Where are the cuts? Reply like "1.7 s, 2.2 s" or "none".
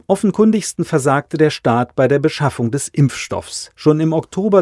3.7 s